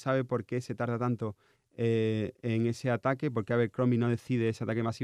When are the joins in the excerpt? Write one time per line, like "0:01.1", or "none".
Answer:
none